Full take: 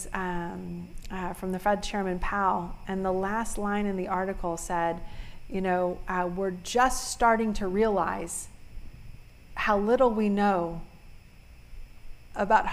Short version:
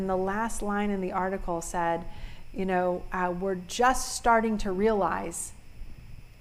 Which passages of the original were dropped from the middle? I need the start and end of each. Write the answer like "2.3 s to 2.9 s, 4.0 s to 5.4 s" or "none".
none

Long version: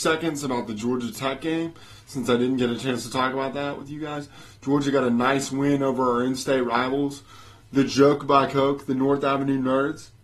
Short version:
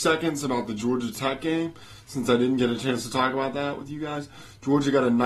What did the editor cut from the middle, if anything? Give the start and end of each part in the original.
none

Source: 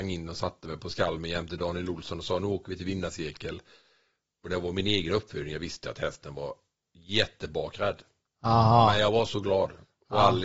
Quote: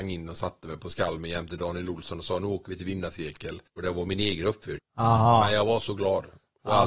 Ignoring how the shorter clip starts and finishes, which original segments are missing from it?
3.7 s to 4.3 s, 5.4 s to 8.2 s

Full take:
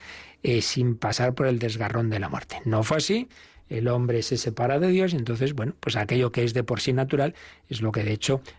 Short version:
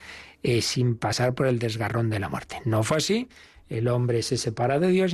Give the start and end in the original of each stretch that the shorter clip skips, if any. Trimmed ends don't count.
none

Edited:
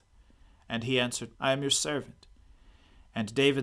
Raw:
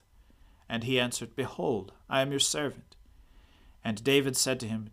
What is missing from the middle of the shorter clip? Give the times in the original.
1.4 s to 2.0 s

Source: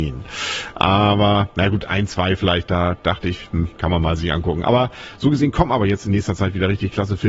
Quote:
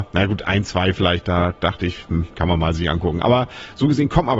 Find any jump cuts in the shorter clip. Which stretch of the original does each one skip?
none

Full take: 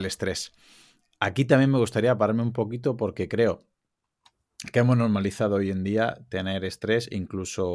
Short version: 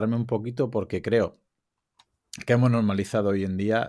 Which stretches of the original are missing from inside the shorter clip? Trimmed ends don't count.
none

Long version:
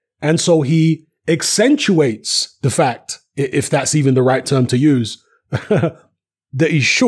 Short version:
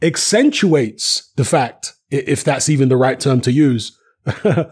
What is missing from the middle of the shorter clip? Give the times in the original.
none

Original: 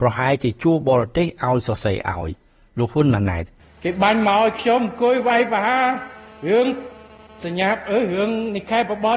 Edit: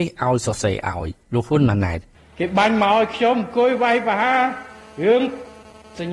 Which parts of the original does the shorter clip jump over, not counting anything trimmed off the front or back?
2.4 s to 2.7 s

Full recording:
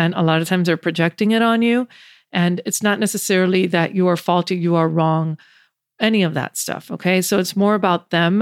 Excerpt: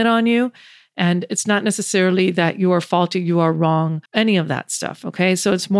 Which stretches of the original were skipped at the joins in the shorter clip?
5.4 s to 5.9 s

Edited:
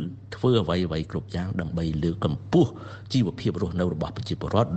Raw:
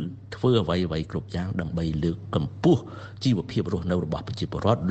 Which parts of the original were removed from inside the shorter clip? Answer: 2.2 s to 2.3 s

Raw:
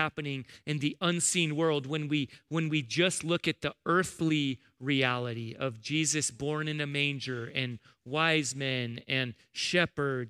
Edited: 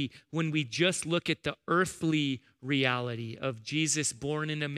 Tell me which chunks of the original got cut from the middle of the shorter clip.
none

